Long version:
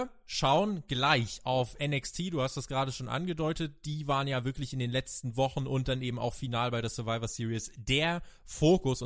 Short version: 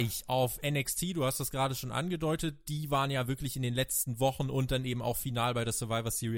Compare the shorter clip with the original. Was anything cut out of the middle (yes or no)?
no